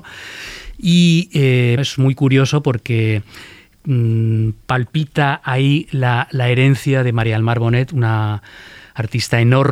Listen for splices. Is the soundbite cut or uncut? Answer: cut